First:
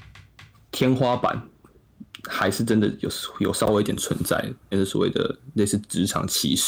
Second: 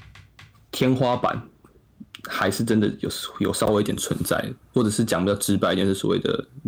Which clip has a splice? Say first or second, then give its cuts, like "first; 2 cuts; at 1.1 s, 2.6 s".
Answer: first; 1 cut; at 4.7 s